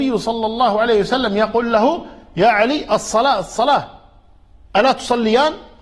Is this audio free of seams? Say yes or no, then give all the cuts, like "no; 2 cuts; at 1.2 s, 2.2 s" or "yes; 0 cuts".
yes; 0 cuts